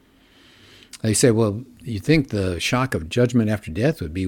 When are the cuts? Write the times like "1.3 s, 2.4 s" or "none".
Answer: none

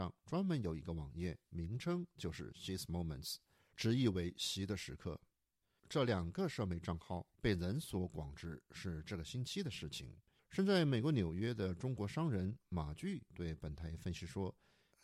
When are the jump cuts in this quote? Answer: 10.4 s

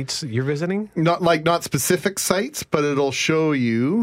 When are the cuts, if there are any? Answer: none

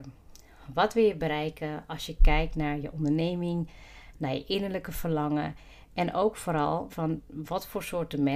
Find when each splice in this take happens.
6.9 s

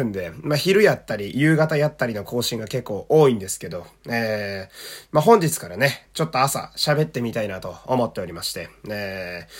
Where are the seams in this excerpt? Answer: 6.0 s

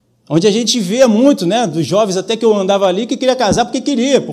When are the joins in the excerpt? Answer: none

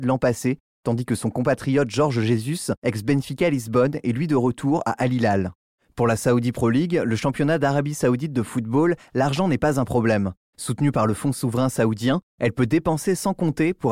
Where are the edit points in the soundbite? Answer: none

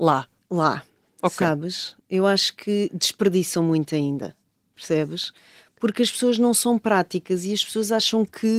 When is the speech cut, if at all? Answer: none

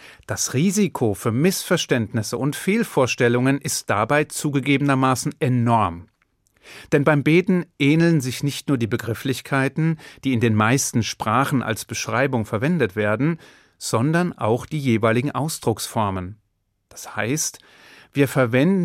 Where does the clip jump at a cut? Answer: none

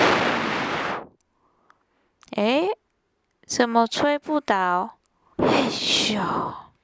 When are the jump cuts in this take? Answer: 5.3 s

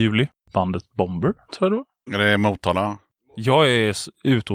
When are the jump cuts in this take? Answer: 2.1 s

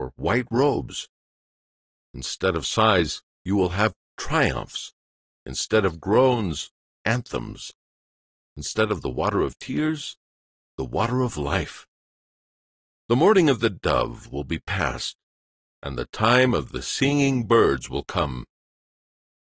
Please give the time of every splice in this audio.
none

